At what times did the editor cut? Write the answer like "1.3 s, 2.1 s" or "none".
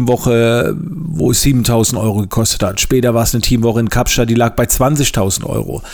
none